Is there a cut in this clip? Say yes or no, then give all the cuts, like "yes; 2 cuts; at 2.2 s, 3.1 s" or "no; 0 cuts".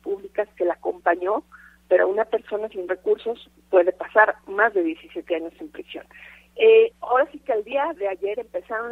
yes; 2 cuts; at 6.9 s, 7.9 s